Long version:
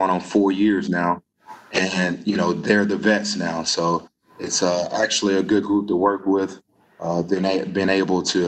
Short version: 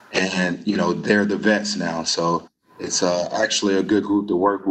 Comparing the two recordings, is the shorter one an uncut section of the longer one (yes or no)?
yes